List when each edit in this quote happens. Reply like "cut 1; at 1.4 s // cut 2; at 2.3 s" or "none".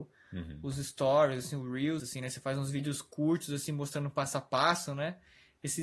cut 1; at 2.0 s